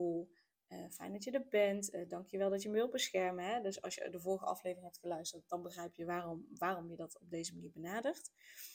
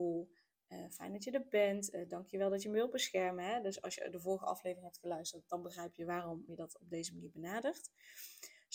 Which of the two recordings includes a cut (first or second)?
second